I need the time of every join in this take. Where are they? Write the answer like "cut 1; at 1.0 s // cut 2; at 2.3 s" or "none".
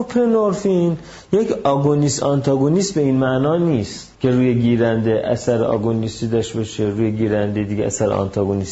cut 1; at 4.2 s